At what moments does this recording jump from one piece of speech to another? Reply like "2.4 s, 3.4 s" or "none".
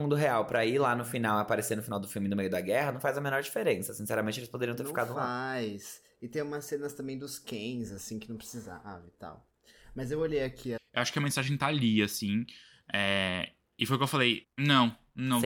10.8 s, 14.4 s